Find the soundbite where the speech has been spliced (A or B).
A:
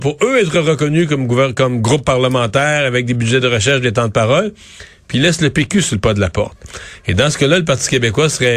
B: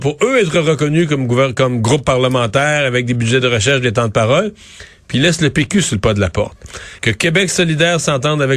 B